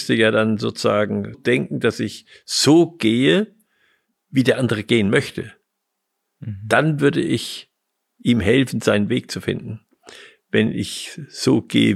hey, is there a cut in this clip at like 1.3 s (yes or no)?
yes